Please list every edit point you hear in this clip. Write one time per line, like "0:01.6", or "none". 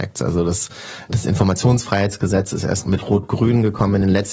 none